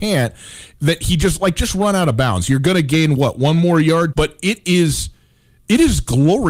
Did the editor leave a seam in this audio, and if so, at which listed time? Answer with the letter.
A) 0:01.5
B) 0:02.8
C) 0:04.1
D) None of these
C